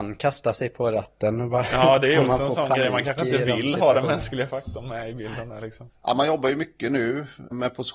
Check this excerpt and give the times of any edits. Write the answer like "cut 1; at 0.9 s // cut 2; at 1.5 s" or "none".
none